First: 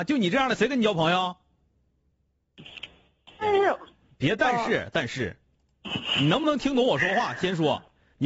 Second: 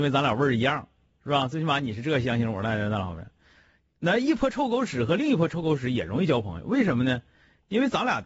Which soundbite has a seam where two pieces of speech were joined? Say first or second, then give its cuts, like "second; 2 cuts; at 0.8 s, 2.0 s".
first; 2 cuts; at 3.4 s, 4.9 s